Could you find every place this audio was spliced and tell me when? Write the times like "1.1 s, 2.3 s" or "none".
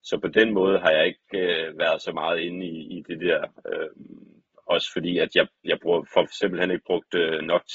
none